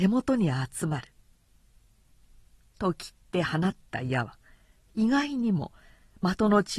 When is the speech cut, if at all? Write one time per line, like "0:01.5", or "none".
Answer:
0:02.1